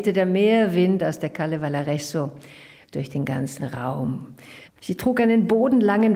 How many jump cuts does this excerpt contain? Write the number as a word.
one